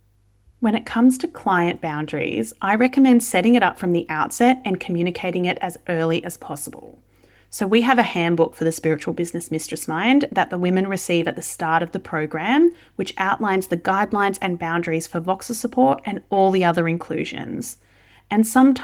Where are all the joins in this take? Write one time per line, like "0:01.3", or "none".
none